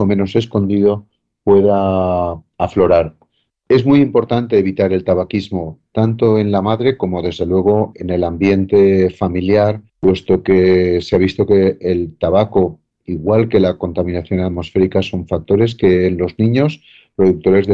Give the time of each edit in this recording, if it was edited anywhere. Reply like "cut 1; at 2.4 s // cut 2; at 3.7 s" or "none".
cut 1; at 3.5 s // cut 2; at 7.9 s // cut 3; at 9.9 s